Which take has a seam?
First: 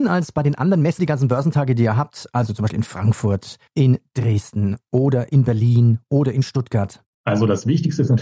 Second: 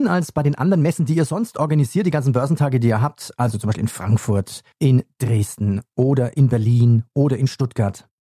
first; 1 cut; at 1.0 s

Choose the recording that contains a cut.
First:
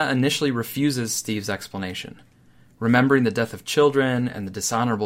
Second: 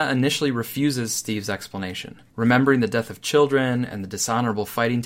second; 1 cut; at 2.3 s

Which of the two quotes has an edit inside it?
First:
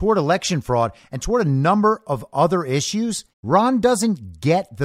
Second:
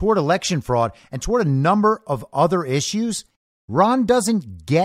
first; 1 cut; at 3.3 s

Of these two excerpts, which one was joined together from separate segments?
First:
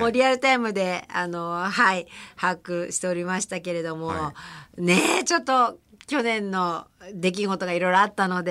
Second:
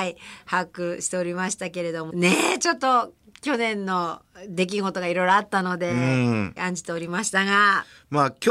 second; 2 cuts; at 2.1 s, 6.6 s

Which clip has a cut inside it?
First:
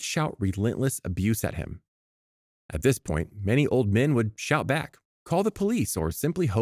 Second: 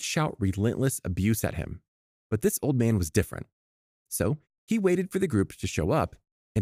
second; 1 cut; at 2.2 s

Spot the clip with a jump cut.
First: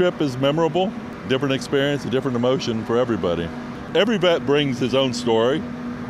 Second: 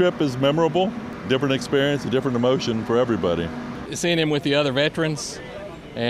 second; 1 cut; at 3.9 s

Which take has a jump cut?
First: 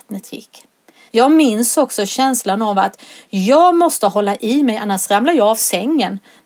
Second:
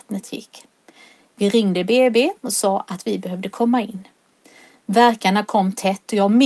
first; 1 cut; at 1.1 s

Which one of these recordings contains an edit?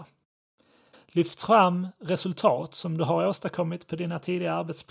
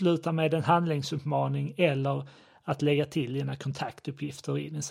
first; 1 cut; at 0.9 s

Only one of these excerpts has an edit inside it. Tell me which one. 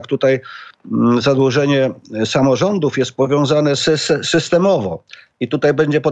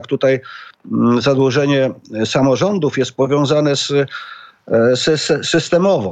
first; 1 cut; at 3.8 s

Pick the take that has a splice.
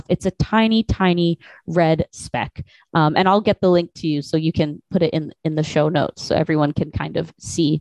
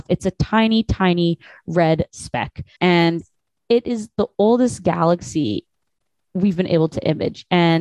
second; 1 cut; at 2.8 s

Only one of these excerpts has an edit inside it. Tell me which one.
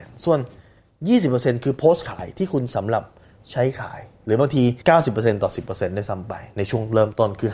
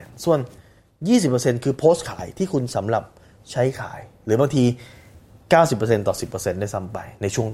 first; 1 cut; at 4.8 s

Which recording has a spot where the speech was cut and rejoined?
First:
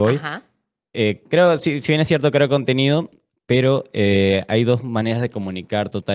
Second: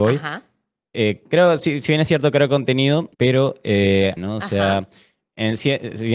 second; 2 cuts; at 3.1 s, 4.2 s

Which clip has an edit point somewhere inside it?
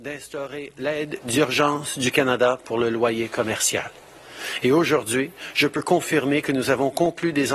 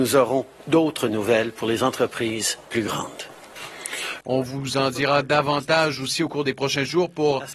second; 1 cut; at 4.2 s

